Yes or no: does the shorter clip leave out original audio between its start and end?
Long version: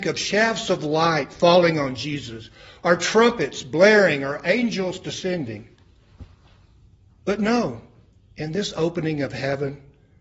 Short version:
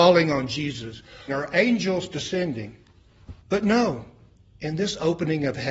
yes